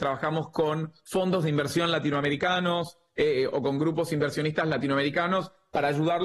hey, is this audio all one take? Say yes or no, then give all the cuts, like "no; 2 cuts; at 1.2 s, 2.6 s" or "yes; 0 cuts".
yes; 0 cuts